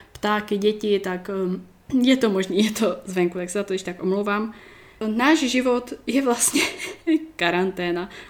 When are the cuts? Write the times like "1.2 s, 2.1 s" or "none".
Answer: 5.0 s